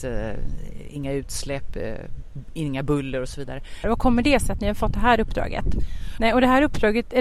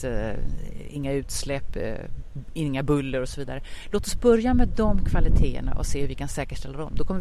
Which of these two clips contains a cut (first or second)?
first